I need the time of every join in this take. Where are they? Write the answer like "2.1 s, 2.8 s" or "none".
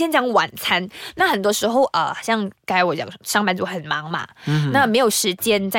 none

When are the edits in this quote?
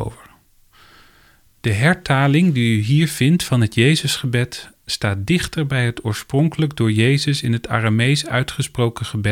none

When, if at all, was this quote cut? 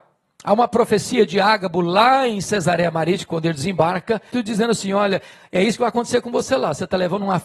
4.3 s

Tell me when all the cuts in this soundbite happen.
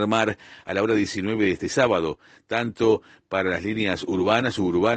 none

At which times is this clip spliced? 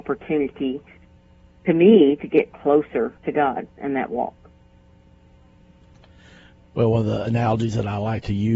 3.2 s

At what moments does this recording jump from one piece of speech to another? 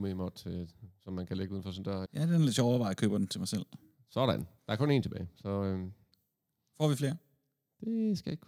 2.1 s

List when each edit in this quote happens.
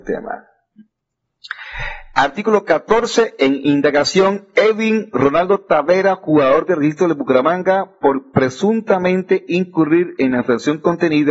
none

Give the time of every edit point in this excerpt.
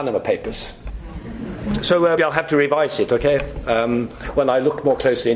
2.2 s

